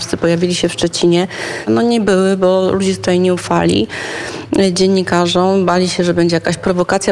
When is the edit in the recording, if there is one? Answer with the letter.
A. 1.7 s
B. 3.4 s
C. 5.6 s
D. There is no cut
A